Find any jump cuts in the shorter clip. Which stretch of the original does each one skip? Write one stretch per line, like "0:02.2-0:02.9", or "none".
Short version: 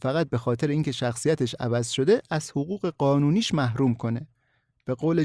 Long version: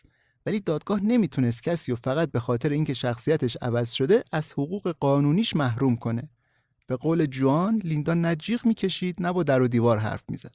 none